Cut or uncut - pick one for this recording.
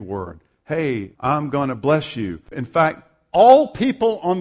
cut